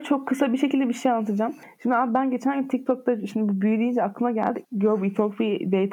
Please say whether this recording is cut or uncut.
cut